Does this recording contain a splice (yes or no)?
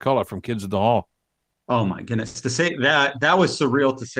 no